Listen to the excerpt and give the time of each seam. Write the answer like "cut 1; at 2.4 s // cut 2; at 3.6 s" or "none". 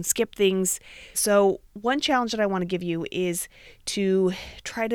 cut 1; at 1.1 s